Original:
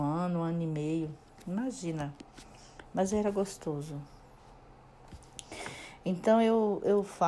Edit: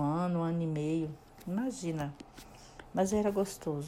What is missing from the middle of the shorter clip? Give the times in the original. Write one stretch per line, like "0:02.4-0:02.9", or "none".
none